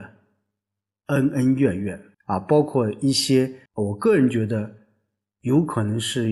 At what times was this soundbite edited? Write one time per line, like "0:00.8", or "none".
0:02.1
0:03.7